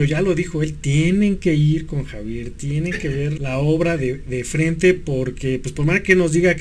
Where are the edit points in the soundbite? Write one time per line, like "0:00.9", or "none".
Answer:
0:03.4

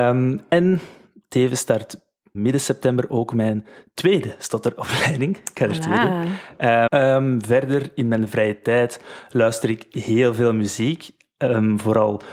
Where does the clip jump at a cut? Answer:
0:02.3
0:06.9

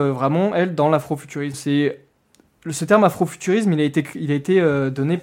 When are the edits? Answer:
0:01.5

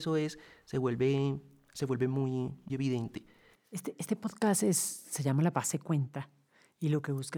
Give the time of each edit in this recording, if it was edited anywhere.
0:02.7

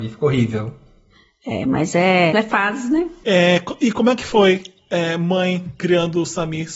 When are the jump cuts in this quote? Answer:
0:02.3

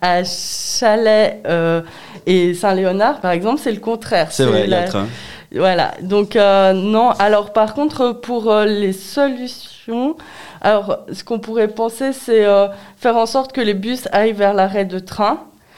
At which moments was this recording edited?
none

